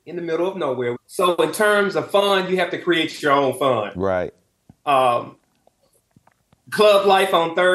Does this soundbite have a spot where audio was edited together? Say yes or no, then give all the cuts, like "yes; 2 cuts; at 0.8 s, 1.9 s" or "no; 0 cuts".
yes; 1 cut; at 0.9 s